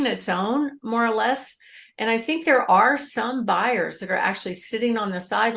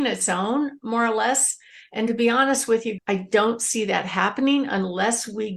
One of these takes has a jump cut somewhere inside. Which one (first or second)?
second